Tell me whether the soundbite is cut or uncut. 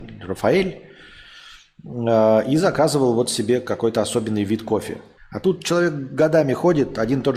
cut